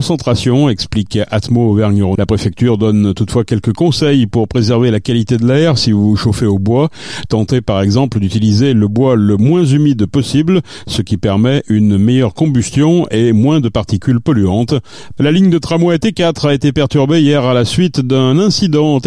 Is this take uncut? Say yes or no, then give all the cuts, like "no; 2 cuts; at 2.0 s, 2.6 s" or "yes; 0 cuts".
no; 2 cuts; at 2.2 s, 15.2 s